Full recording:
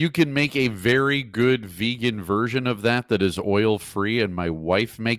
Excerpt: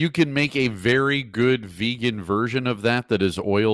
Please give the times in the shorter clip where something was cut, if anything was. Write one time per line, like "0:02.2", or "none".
none